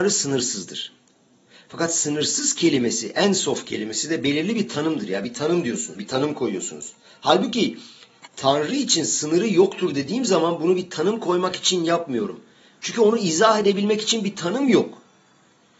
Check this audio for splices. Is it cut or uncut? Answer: cut